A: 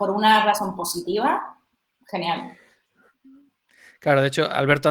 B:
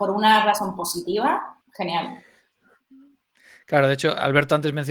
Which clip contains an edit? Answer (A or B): B